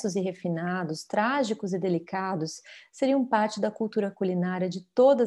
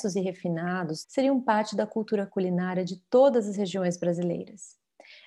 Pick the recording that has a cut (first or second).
second